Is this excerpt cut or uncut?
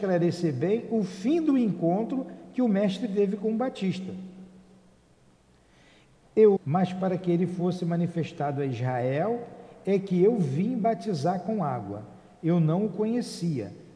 cut